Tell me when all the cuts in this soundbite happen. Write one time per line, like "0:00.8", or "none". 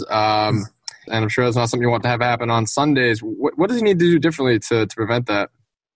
0:01.1

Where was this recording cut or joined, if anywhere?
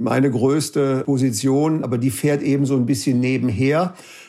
none

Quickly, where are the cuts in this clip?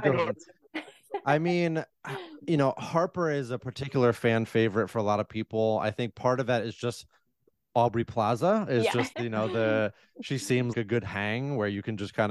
0:09.1
0:10.7

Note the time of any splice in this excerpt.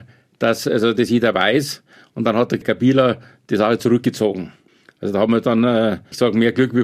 none

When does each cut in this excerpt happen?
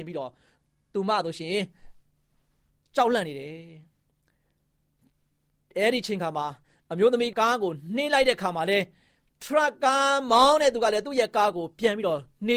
0:07.3

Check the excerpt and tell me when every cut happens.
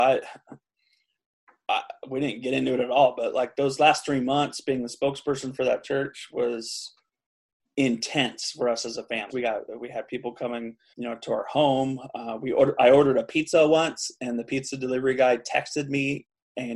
0:09.3
0:10.9

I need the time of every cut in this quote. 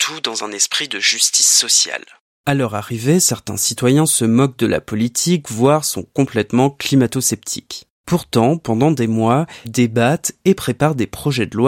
0:09.6

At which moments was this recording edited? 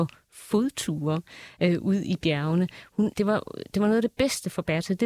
0:03.1

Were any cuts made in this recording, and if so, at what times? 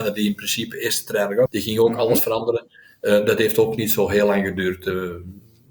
0:01.5

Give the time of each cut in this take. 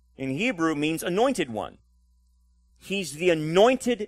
0:02.7

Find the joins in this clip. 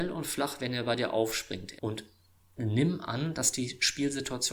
0:01.8

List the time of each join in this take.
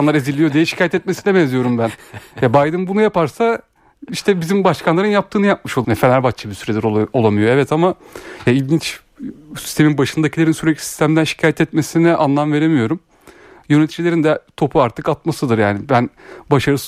0:05.8

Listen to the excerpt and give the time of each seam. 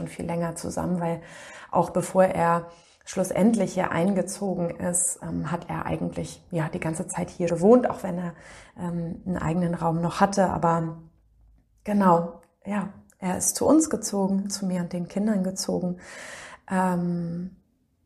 0:07.5

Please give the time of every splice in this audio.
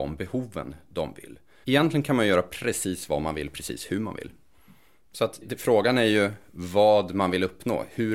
0:01.6
0:05.4

